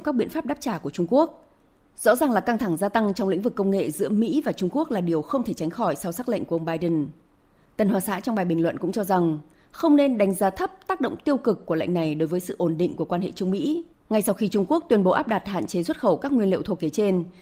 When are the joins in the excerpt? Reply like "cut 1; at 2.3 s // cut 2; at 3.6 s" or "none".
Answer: cut 1; at 14.0 s